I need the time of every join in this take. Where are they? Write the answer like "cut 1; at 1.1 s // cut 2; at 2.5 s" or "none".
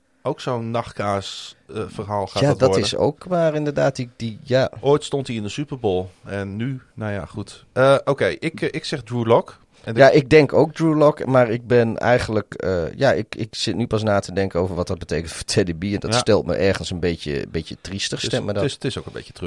none